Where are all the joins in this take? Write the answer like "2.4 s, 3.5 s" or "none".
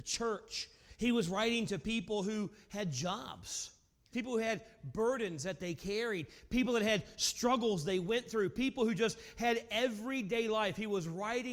4.1 s